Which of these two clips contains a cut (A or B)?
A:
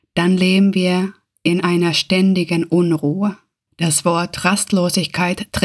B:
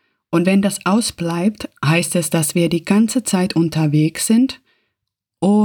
A